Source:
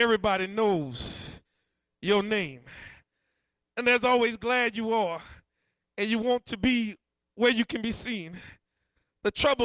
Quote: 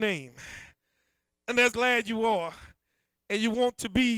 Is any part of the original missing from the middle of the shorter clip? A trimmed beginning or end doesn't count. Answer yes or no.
yes